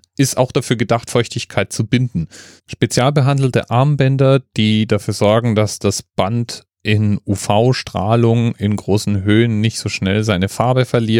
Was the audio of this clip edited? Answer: yes; 1 cut; at 2.6 s

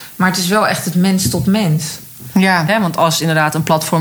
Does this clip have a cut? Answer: yes; 1 cut; at 2.7 s

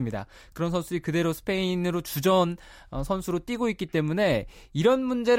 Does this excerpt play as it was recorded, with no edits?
yes; 0 cuts

